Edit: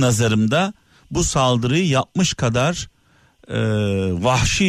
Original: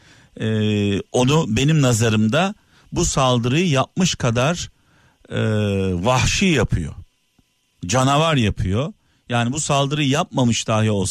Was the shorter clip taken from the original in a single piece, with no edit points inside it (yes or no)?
yes